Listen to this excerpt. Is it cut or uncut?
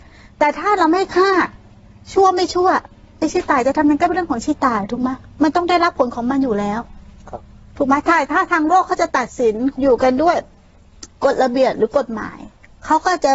uncut